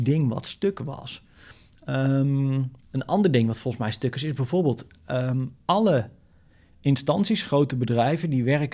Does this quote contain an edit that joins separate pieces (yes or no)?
yes